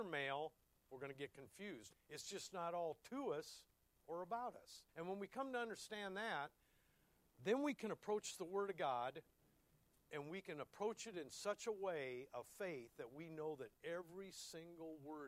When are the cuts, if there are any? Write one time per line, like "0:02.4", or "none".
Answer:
0:01.9
0:04.9